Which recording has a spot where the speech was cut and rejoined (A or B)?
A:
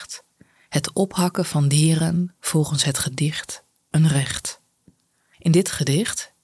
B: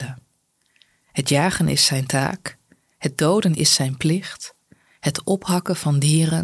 A